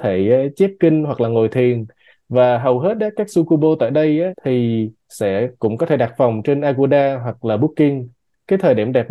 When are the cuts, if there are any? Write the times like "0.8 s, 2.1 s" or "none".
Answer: 4.3 s